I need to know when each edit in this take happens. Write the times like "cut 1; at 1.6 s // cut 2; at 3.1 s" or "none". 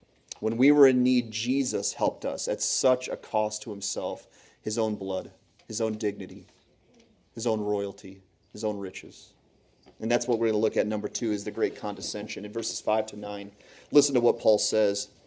none

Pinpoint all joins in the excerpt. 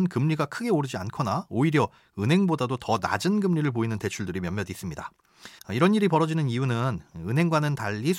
cut 1; at 5.6 s

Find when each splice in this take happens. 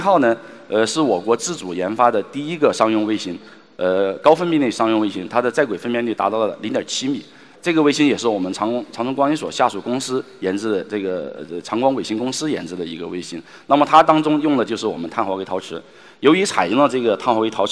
none

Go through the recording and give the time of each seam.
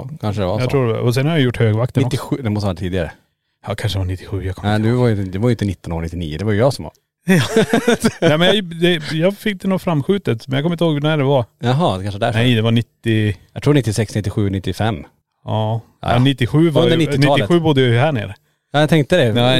none

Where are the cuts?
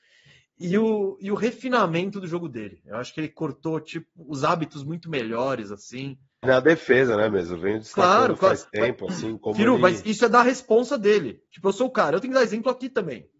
cut 1; at 6.4 s

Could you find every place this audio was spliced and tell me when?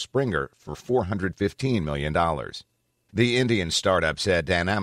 cut 1; at 3.1 s

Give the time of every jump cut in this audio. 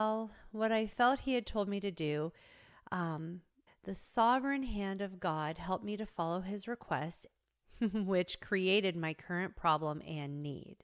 cut 1; at 3.7 s // cut 2; at 7.4 s

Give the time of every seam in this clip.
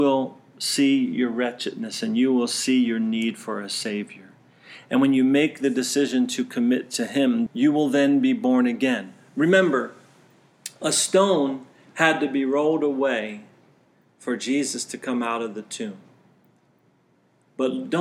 cut 1; at 7.5 s

